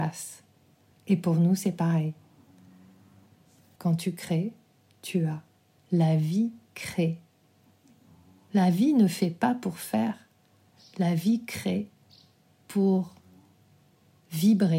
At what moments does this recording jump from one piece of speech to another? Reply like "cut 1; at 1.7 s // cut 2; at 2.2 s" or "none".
cut 1; at 0.9 s // cut 2; at 3.8 s // cut 3; at 5.8 s